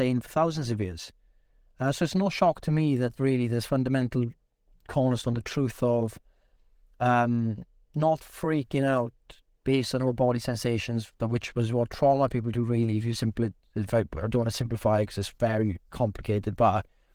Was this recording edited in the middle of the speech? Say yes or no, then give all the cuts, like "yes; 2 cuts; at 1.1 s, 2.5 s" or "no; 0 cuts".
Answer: no; 0 cuts